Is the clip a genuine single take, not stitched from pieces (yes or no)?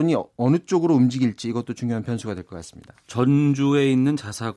no